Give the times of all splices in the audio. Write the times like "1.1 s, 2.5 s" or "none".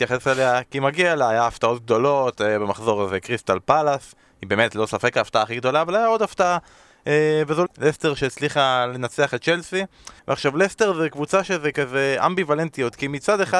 7.7 s, 10.2 s